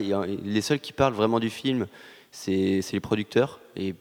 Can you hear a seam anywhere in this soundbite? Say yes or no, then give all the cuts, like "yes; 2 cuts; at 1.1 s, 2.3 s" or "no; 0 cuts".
no; 0 cuts